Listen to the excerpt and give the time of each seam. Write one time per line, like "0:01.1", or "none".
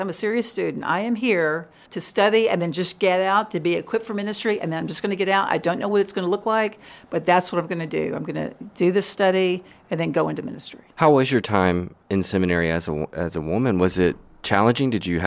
0:10.9